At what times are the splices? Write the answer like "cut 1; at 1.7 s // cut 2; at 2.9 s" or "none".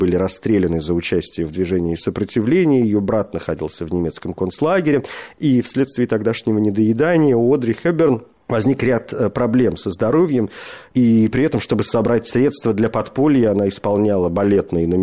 none